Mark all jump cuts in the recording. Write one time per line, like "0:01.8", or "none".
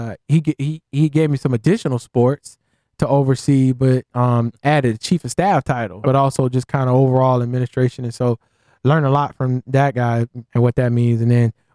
0:06.0
0:10.5